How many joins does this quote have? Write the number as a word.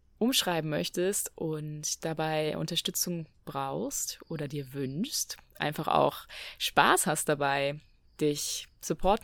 zero